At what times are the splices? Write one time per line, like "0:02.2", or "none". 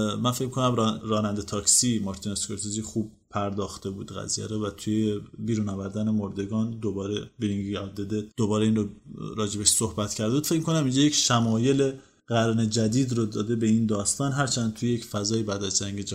0:01.0
0:08.3